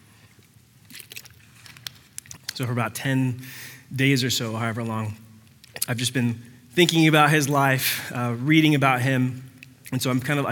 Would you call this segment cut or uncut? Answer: cut